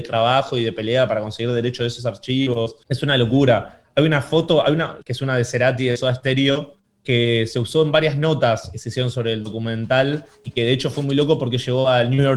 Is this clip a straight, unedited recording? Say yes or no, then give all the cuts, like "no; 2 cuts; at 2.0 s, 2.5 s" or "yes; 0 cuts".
no; 2 cuts; at 5.0 s, 8.7 s